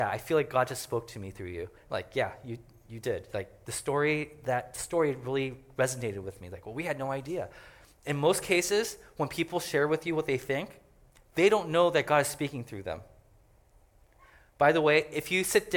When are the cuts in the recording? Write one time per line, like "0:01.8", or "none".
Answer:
0:01.8